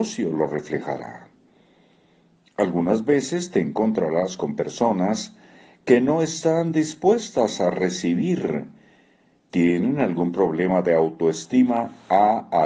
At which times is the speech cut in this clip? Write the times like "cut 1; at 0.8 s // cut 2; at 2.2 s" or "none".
none